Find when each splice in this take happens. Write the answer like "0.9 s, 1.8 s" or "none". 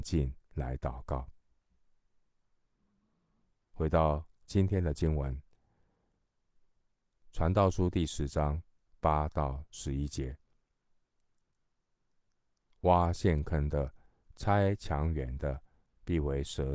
14.3 s